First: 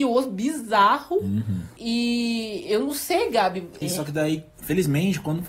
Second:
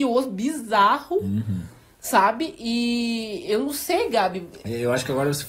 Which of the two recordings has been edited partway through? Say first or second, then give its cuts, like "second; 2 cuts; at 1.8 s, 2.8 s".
first; 2 cuts; at 1.8 s, 3.8 s